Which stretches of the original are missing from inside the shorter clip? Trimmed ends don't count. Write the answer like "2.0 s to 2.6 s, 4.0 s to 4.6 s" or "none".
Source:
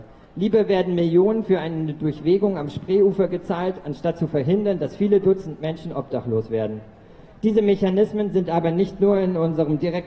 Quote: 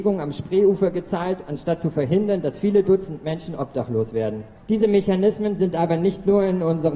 6.9 s to 7.3 s